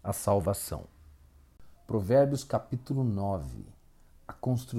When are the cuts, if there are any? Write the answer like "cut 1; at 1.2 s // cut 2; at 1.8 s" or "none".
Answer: cut 1; at 1.7 s